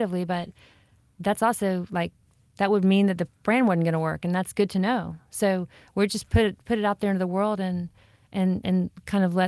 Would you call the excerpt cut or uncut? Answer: uncut